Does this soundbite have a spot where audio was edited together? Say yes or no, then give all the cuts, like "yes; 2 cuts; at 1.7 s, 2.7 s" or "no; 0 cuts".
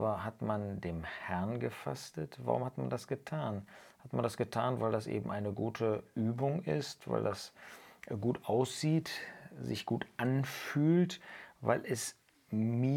no; 0 cuts